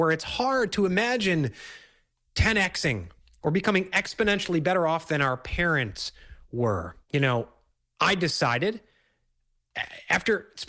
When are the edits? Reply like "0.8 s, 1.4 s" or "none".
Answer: 7.0 s